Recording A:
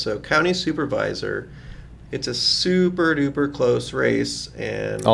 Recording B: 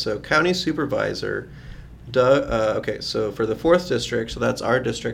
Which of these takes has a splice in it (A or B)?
A